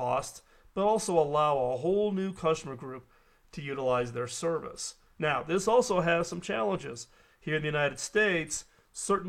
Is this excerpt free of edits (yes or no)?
yes